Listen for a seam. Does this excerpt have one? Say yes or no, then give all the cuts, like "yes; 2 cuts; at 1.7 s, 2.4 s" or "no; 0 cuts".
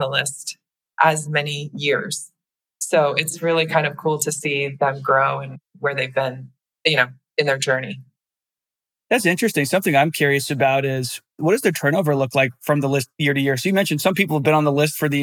no; 0 cuts